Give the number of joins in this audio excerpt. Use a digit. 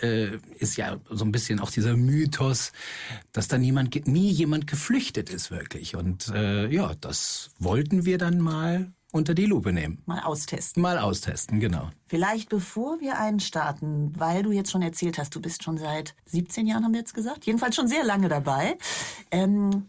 1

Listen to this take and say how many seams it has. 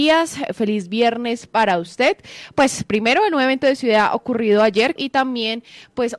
2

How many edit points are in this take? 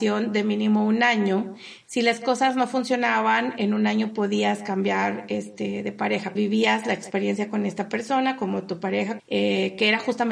2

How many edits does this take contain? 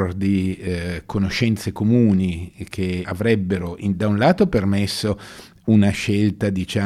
1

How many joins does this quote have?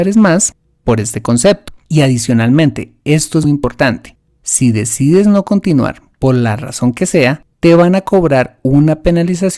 2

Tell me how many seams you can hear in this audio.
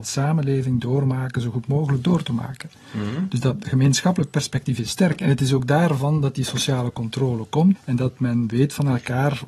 1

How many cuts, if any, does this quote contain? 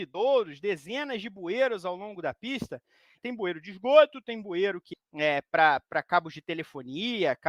2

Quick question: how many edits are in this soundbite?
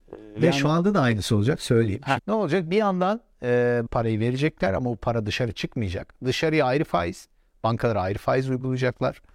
2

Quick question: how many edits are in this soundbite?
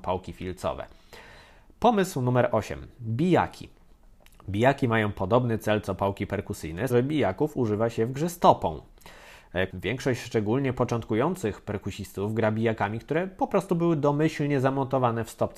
2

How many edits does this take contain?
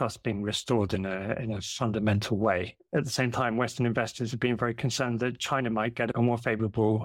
1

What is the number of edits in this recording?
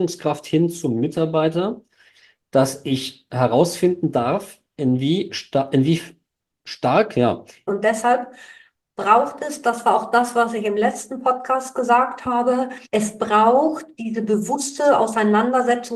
2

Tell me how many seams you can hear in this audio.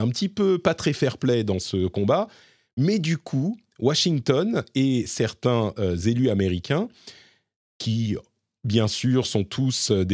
0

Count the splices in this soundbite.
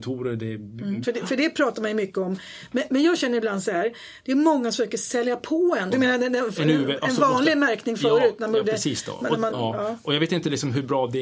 3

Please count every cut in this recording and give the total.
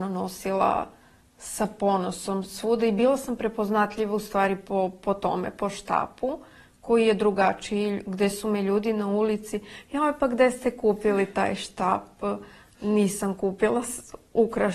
0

